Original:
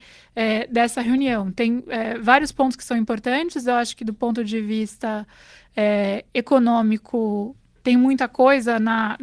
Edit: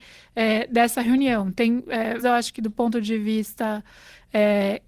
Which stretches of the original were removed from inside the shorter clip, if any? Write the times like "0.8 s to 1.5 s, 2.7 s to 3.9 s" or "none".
2.2 s to 3.6 s